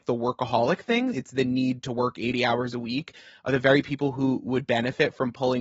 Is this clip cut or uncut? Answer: uncut